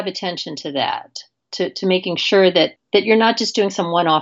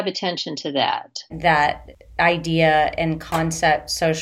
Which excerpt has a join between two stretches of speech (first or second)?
second